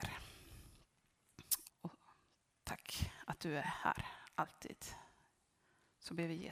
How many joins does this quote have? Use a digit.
1